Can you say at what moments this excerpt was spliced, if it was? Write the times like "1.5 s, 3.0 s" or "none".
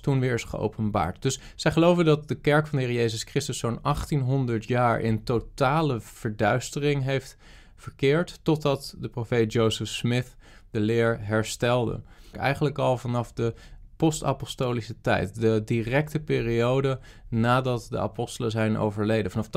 12.3 s